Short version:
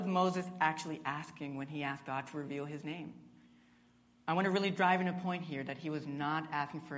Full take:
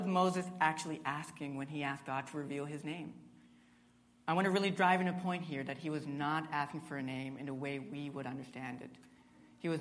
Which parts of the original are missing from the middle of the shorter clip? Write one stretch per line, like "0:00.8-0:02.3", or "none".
none